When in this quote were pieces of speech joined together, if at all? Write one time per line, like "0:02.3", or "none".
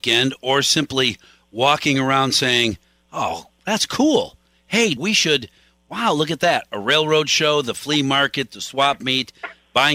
0:05.0